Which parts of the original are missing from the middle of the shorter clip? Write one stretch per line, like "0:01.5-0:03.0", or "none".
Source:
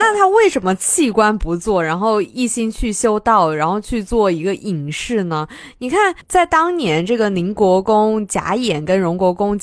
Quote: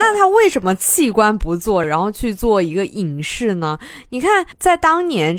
0:01.8-0:03.5

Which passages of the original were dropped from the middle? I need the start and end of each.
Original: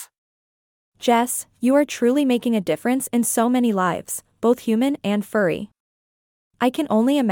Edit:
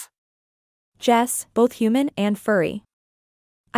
0:01.5-0:04.4

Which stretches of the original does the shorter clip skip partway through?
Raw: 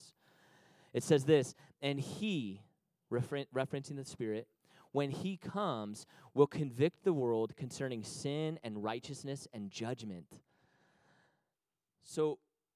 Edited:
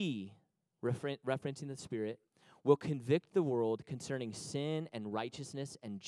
0:04.9-0:06.3

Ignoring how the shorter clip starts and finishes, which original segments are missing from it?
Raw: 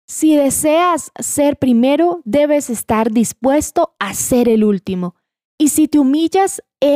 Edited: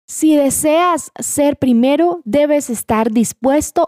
none

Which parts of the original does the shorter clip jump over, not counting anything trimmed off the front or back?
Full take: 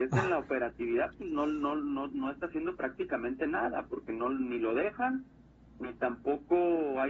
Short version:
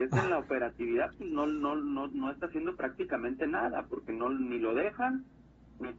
none

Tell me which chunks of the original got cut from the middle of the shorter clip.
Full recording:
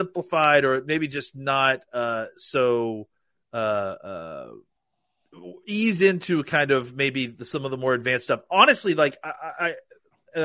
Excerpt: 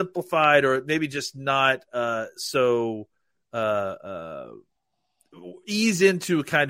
none

